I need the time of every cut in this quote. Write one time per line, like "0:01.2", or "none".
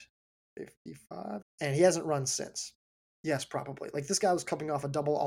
0:01.4
0:03.1